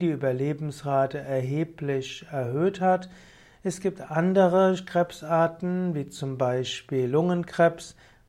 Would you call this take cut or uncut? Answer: uncut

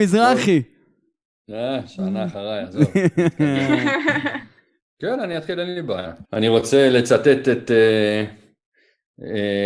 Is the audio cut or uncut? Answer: cut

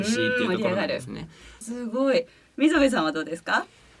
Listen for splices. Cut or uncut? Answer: cut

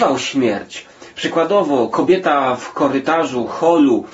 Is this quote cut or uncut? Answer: uncut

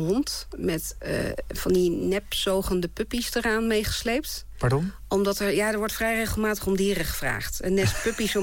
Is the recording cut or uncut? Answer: uncut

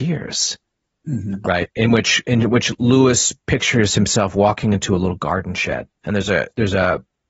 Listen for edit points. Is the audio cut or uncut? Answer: cut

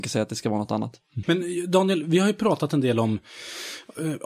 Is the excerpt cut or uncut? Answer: cut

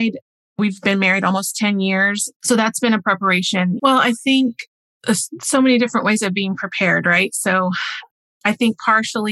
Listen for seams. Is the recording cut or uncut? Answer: cut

